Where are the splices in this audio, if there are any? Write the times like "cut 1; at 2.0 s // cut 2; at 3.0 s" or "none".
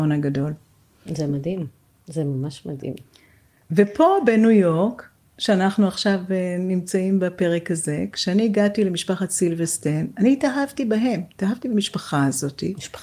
none